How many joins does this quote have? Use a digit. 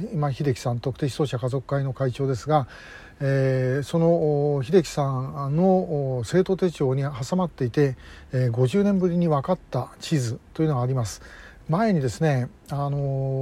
1